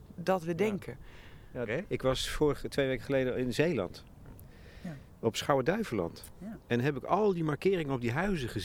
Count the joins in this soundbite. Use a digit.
1